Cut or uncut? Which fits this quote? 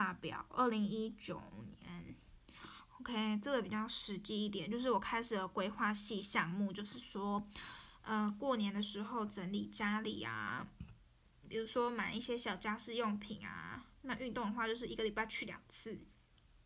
uncut